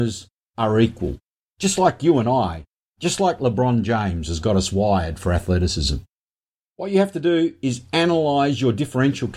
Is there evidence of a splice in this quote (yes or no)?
no